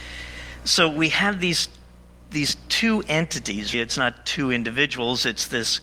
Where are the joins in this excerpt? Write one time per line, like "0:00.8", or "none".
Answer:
0:03.7